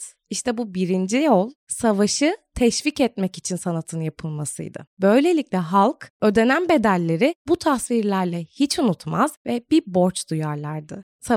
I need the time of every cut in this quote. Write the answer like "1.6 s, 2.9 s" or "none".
4.9 s